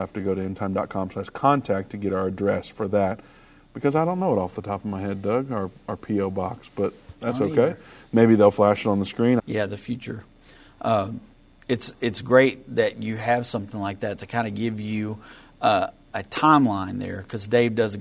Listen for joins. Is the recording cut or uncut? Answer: cut